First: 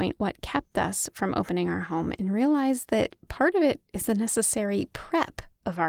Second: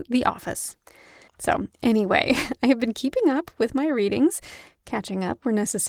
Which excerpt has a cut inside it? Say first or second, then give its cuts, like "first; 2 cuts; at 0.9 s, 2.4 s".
second; 1 cut; at 1.3 s